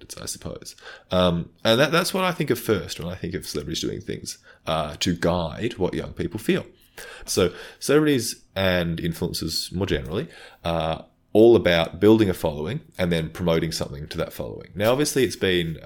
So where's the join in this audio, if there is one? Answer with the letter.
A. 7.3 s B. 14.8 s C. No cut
A